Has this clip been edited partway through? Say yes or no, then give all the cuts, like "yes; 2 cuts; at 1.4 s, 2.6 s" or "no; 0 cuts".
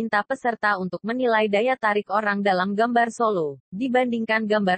no; 0 cuts